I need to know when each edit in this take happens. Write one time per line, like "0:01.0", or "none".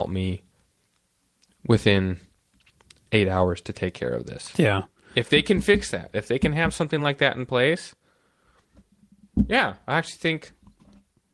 none